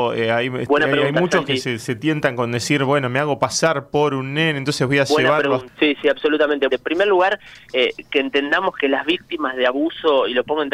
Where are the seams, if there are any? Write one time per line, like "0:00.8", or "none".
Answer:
0:05.7
0:06.7